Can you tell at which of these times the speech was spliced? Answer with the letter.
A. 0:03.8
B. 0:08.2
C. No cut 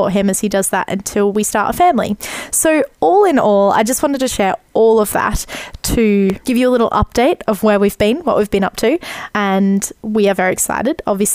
C